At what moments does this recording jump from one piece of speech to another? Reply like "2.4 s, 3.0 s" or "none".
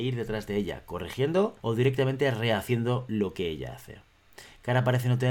1.6 s